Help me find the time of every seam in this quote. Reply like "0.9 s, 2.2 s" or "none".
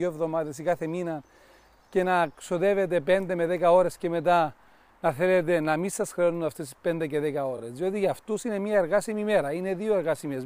none